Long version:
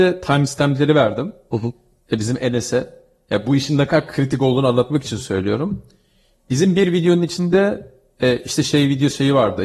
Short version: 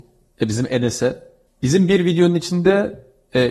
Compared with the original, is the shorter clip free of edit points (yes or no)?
no